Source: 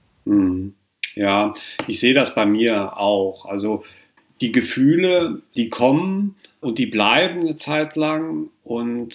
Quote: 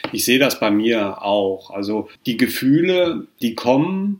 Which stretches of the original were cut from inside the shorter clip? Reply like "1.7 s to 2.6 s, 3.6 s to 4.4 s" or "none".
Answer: 3.9 s to 4.3 s